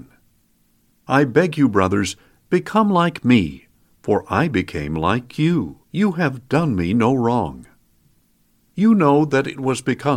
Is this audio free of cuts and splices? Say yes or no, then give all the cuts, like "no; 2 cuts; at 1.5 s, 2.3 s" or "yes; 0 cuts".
no; 1 cut; at 5.8 s